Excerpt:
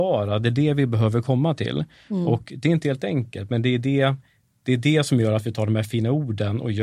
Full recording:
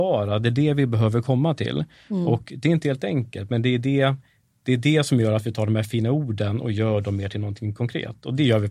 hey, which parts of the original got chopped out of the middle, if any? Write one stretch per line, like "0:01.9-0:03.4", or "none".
none

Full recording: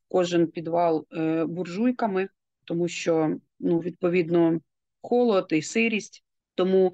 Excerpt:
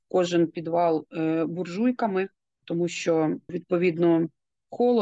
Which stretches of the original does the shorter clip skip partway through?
0:03.5-0:03.8

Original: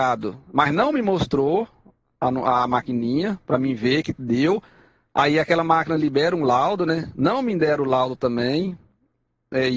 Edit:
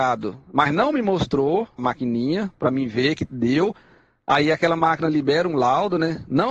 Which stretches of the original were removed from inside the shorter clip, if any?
0:01.8-0:02.7

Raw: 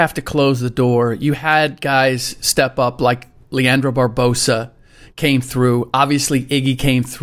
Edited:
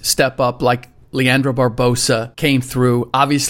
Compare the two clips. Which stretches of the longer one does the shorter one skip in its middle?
0:04.7-0:05.1

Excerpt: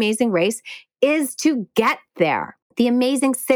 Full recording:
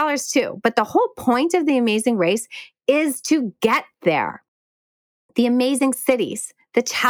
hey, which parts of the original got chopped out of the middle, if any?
0:04.5-0:05.2

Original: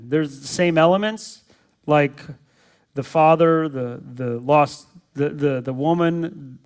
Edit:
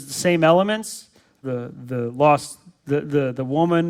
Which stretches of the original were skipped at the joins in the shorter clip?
0:01.8-0:03.7

